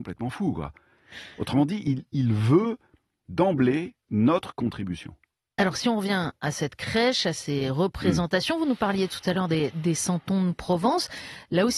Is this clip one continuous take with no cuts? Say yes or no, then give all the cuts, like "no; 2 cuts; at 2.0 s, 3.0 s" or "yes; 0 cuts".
no; 1 cut; at 4.0 s